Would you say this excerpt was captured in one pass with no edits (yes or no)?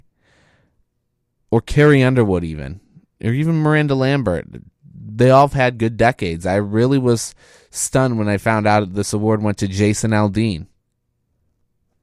yes